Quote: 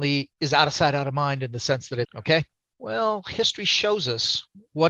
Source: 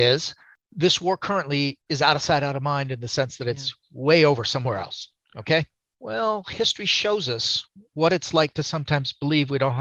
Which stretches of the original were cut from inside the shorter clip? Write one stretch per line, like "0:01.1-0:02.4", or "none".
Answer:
0:03.5-0:05.3

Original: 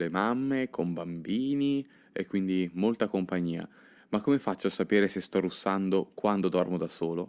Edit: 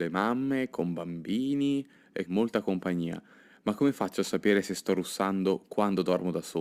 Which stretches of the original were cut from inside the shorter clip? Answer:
0:02.2-0:02.7

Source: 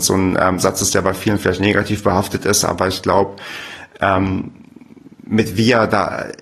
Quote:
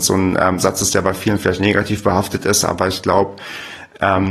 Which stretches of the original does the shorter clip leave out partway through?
none

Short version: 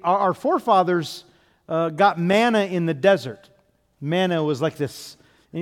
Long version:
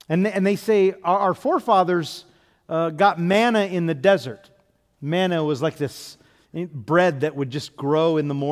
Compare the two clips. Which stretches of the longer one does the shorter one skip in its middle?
none

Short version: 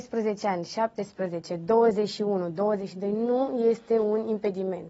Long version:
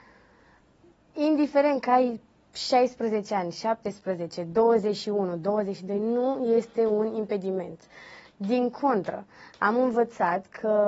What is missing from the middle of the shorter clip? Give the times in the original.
none

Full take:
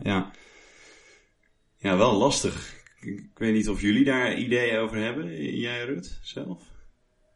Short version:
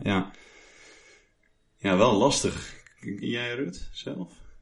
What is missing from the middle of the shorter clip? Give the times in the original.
0:03.2-0:05.5

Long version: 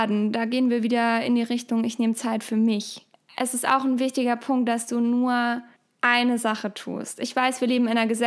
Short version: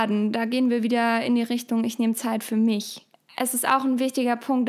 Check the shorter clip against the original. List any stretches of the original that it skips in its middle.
none

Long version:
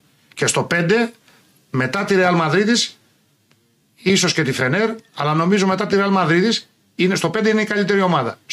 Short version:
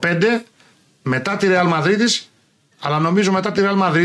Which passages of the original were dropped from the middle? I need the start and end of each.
0:03.4-0:05.1

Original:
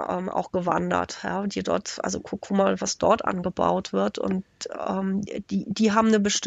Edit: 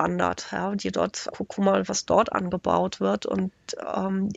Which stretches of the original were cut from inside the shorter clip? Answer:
0:02.0-0:02.2

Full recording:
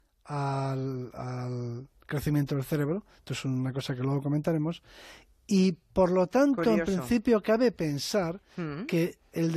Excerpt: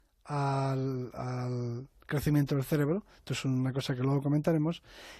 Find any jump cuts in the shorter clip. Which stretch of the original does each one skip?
none

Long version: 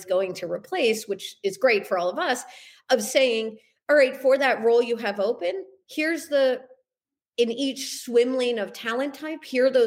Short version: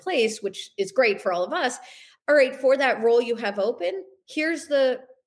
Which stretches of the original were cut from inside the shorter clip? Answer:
0:02.8-0:03.8

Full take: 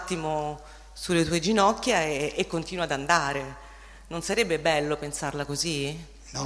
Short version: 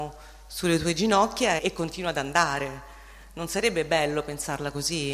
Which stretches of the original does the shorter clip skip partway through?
0:02.0-0:02.3

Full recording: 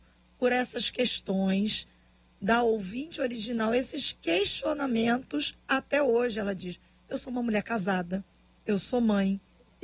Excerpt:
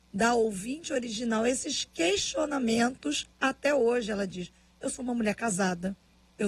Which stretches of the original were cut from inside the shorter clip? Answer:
none

